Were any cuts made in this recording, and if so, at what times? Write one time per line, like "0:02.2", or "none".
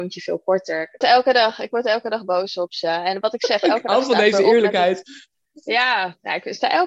0:01.0